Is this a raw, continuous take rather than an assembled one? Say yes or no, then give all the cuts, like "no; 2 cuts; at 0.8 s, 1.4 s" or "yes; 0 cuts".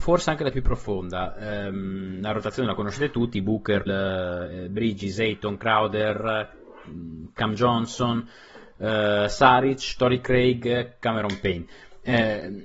no; 1 cut; at 3.9 s